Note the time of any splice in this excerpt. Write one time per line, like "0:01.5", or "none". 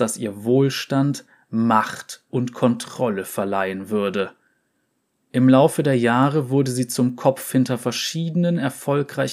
0:05.2

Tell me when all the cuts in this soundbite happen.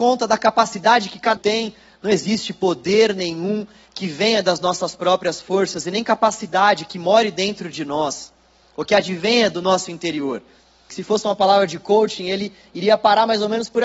0:01.4
0:10.9

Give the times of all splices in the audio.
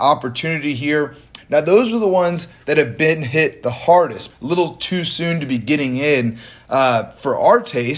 0:01.4
0:04.3

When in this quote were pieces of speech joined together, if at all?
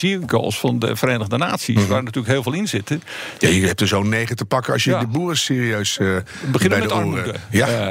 0:03.4

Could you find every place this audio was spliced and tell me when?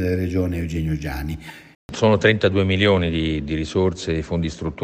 0:01.7

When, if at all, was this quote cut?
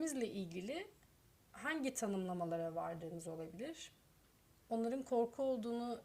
0:04.6

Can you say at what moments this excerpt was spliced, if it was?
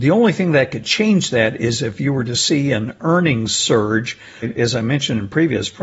0:04.4

